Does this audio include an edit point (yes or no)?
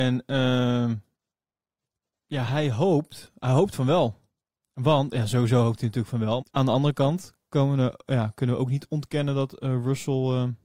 yes